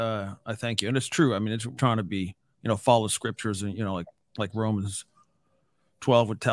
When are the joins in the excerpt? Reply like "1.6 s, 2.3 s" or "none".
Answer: 1.8 s